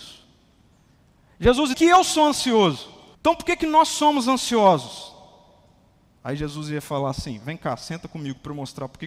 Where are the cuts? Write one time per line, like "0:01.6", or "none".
0:01.7
0:03.1